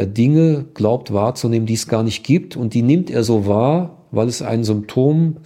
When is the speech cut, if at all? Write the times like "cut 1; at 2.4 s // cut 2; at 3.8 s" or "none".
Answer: none